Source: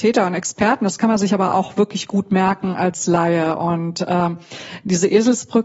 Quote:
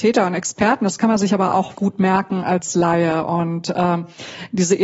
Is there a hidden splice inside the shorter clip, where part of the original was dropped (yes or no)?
yes